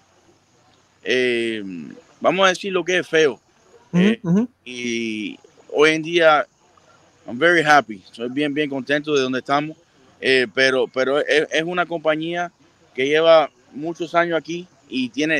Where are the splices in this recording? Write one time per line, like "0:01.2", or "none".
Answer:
none